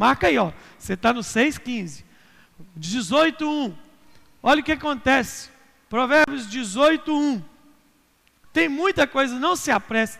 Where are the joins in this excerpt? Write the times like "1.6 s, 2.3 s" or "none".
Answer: 8.5 s